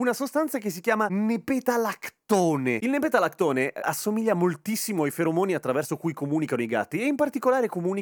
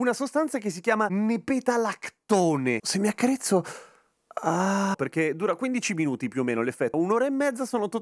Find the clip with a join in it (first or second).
second